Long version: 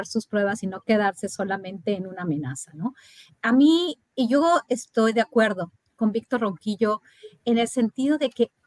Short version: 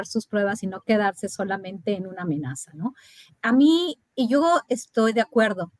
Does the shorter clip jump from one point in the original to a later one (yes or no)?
no